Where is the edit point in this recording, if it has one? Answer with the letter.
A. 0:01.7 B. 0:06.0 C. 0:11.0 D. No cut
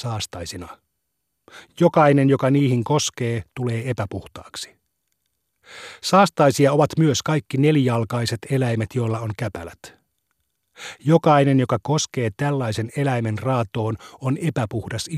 D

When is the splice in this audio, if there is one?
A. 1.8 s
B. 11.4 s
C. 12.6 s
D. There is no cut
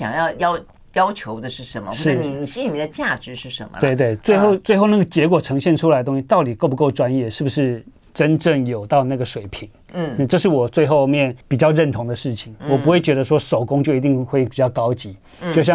B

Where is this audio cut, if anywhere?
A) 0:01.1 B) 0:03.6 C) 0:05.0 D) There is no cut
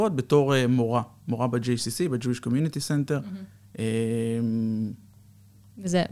D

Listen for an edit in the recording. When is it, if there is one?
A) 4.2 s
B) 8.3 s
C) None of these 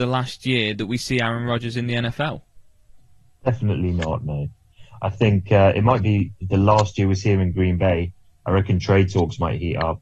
C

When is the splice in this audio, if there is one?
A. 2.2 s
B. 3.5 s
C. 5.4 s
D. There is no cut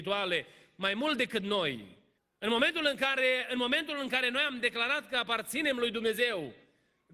A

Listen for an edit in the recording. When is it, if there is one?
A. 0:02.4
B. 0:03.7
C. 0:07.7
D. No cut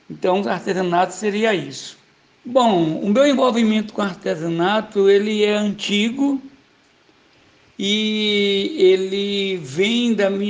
A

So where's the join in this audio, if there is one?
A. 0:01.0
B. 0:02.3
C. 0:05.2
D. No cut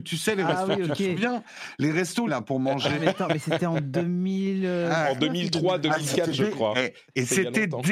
B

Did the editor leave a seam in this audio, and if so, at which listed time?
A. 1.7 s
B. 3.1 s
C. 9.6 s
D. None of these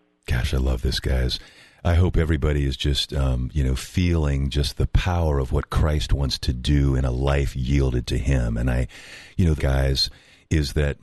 C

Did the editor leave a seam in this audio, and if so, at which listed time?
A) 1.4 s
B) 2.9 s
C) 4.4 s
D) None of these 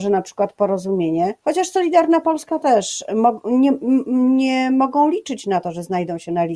A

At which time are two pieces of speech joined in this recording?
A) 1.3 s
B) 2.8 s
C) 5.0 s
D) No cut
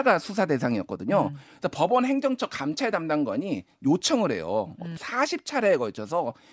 C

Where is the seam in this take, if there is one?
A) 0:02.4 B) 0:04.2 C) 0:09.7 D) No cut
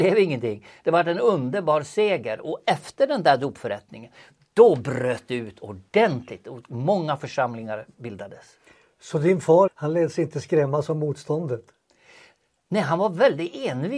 C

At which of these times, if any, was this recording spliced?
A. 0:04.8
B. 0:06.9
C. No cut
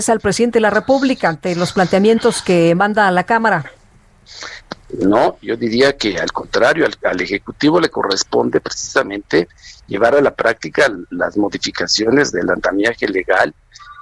A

